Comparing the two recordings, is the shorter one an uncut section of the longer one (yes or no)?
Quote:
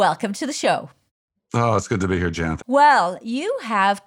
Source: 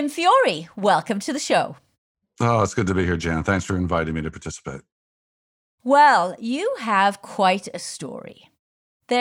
no